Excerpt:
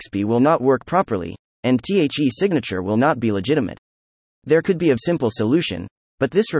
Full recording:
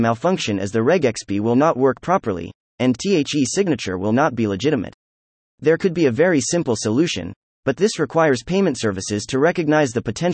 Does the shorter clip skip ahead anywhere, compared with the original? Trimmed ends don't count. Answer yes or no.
yes